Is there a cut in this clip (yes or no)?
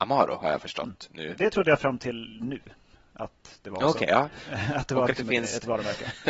no